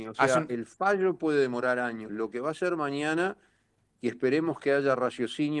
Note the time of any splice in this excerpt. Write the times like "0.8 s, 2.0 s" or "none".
none